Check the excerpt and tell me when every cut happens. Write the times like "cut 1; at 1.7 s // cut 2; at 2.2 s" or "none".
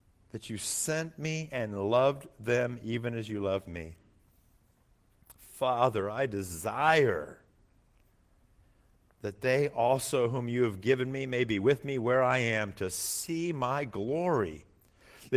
none